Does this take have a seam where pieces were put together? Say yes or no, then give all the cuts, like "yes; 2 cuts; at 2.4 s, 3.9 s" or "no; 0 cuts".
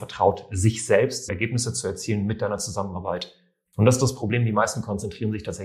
yes; 2 cuts; at 1.3 s, 3.7 s